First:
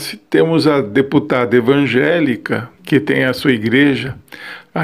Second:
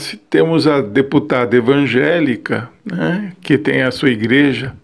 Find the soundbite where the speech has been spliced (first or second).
first